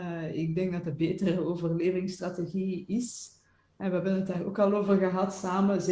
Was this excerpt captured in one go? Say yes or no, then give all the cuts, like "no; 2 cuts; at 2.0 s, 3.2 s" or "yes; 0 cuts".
yes; 0 cuts